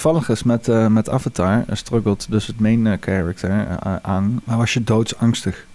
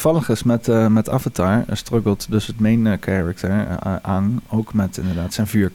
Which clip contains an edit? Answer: first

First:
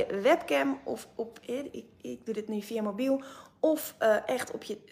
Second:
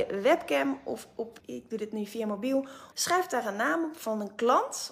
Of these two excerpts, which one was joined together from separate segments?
second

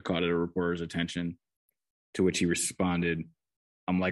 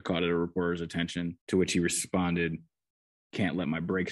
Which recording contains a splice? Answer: second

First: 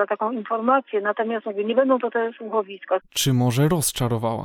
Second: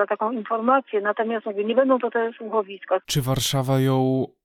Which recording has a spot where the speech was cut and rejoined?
first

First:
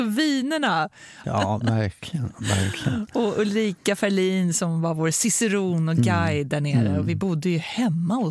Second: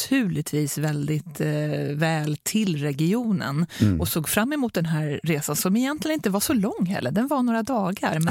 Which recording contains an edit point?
first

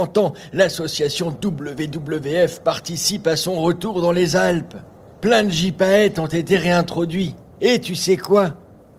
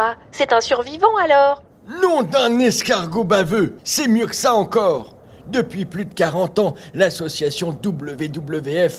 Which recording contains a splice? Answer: second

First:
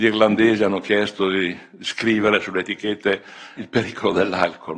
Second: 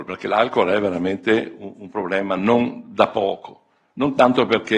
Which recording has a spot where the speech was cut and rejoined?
first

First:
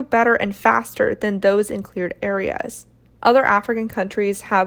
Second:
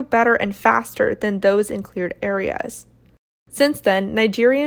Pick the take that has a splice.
first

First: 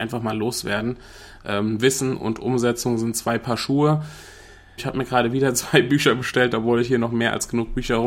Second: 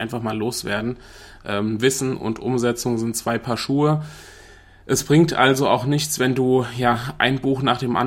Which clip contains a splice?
first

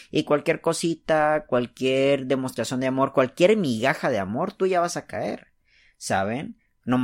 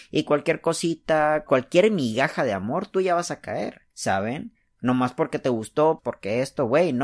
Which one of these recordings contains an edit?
second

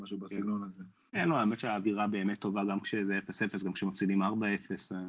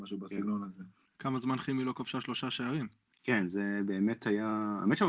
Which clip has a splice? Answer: second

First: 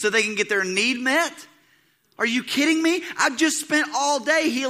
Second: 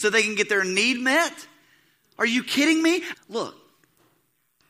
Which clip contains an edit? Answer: second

